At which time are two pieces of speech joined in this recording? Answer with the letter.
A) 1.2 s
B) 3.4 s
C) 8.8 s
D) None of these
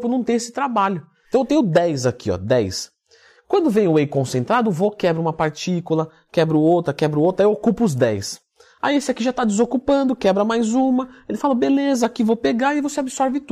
A